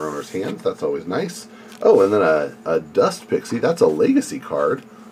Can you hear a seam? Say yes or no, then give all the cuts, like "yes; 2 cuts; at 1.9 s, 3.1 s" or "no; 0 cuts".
no; 0 cuts